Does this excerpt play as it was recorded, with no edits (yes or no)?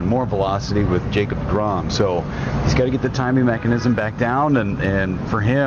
yes